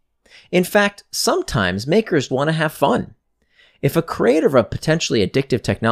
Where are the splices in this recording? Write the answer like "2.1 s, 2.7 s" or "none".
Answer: 2.3 s